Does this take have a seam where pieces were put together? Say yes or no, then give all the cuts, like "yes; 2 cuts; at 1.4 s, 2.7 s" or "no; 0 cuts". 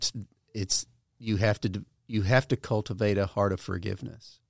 no; 0 cuts